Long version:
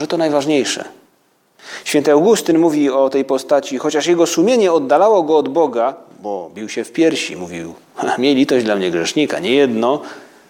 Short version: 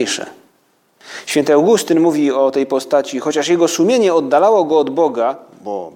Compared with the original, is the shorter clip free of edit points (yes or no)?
yes